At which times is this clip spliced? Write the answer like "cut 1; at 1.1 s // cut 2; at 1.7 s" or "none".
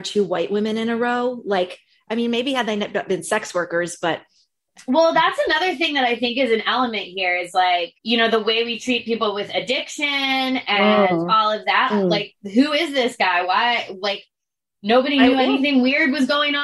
cut 1; at 8.0 s // cut 2; at 11.9 s